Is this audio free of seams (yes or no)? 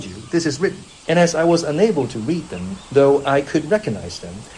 no